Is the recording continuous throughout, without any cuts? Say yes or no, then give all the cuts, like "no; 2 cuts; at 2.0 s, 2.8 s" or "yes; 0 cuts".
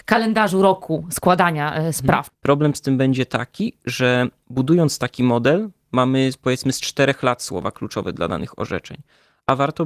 no; 1 cut; at 2.3 s